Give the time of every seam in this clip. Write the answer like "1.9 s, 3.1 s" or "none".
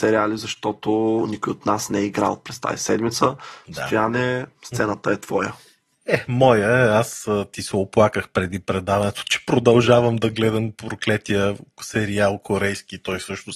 none